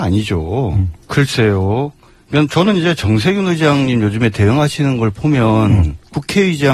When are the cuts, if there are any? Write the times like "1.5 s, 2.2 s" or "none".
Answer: 1.0 s